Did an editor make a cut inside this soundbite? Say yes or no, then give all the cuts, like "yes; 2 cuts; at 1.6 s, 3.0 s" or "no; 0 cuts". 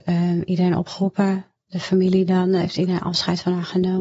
no; 0 cuts